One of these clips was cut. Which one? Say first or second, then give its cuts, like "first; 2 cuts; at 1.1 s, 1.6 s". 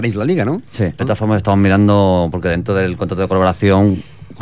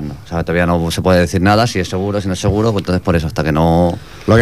first; 1 cut; at 1.0 s